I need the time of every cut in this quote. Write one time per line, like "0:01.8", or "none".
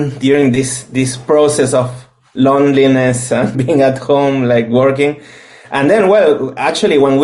0:03.5